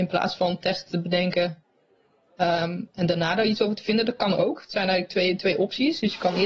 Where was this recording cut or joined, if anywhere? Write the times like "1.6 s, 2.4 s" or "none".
none